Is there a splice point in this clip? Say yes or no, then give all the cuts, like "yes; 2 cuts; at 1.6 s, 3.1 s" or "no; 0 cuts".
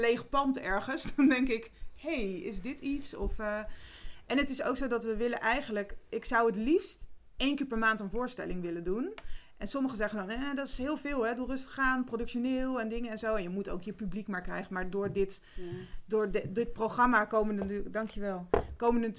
no; 0 cuts